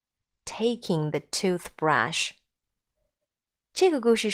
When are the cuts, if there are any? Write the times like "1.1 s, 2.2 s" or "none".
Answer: none

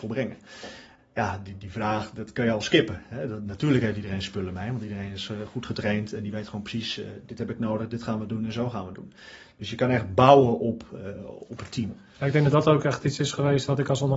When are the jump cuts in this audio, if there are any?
1.0 s

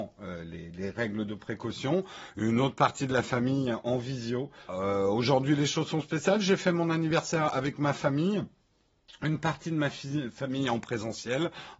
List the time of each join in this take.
4.7 s

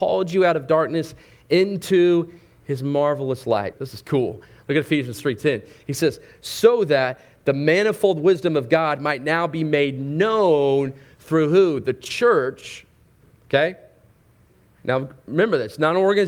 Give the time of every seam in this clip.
3.7 s

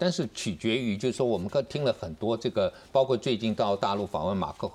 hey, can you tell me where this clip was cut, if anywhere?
none

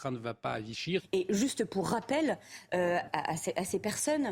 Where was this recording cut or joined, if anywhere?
1.0 s, 3.1 s

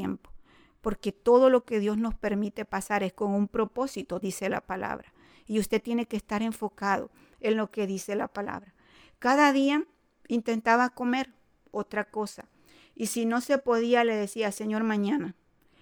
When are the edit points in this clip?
4.2 s

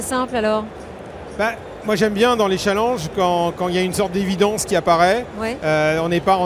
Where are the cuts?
none

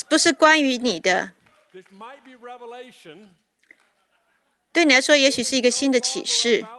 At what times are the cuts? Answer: none

